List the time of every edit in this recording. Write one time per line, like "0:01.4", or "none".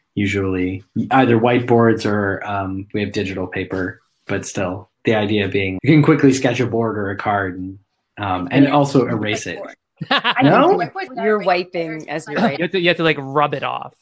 0:05.8
0:11.1
0:12.6

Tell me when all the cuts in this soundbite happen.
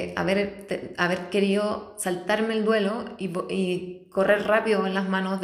none

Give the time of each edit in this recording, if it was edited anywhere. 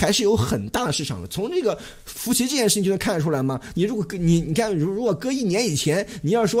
none

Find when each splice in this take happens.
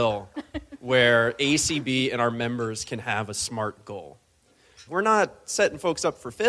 0:04.9

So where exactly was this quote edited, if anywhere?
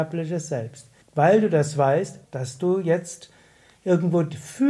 0:01.0
0:02.2

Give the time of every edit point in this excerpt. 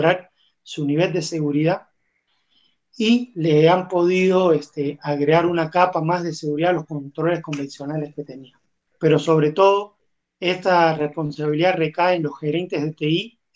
0:08.9

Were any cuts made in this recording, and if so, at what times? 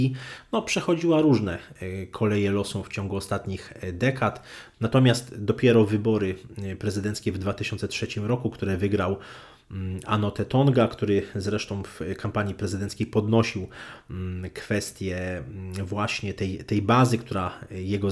0:04.7

